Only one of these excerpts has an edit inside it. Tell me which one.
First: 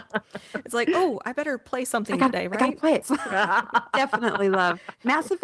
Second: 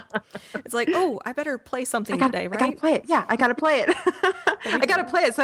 first; 1 cut; at 3.0 s

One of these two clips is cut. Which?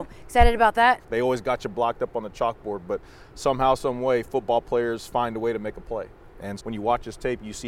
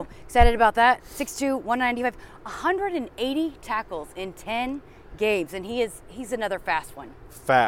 first; 2 cuts; at 1.0 s, 6.6 s

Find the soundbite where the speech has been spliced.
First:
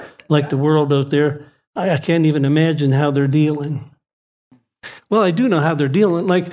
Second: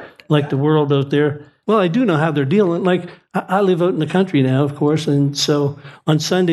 second; 1 cut; at 1.6 s

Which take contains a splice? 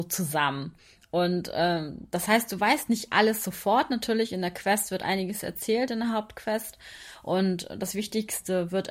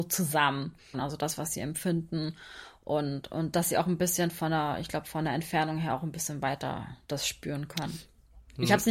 second; 1 cut; at 0.9 s

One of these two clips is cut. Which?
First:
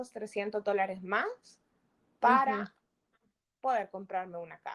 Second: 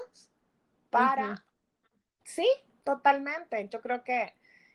second; 1 cut; at 2.2 s

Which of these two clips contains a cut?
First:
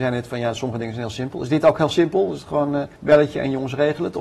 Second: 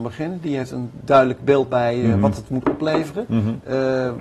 first; 1 cut; at 2.9 s

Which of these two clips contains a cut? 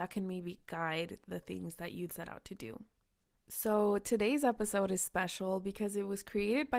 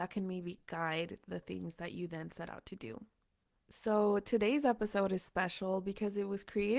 first; 1 cut; at 2.1 s

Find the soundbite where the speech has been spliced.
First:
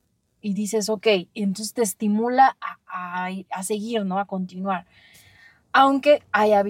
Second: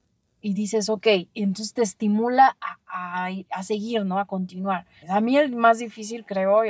second; 1 cut; at 5.0 s

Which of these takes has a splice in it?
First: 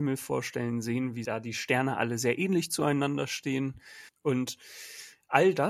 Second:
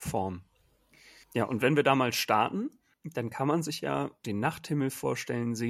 first; 1 cut; at 4.1 s

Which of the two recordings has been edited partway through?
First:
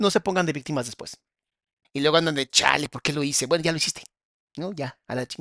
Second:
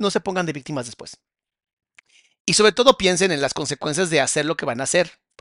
first; 1 cut; at 1.8 s

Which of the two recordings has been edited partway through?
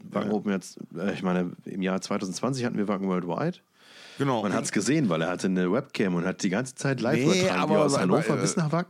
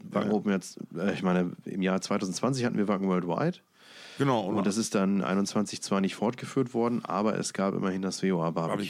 first; 1 cut; at 4.4 s

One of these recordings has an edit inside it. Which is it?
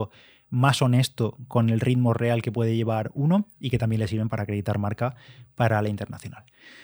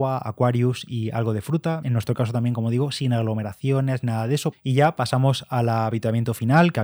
second; 2 cuts; at 1.8 s, 4.5 s

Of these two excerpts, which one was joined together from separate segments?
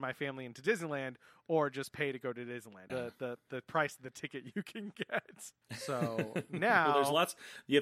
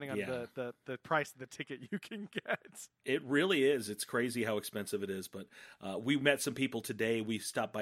first; 2 cuts; at 2.9 s, 5.6 s

